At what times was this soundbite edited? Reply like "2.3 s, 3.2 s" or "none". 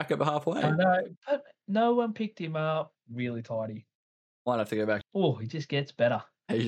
3.0 s, 5.0 s